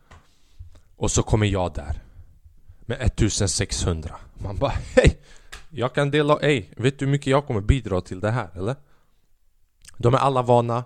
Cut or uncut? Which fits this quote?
uncut